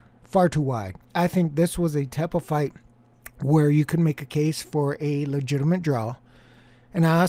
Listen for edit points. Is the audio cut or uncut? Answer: cut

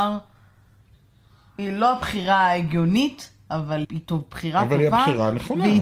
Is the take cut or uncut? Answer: cut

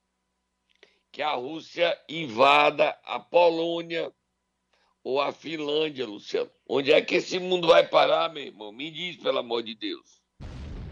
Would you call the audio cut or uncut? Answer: uncut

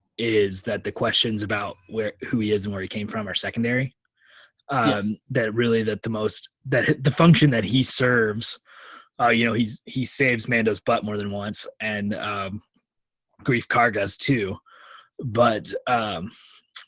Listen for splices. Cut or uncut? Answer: uncut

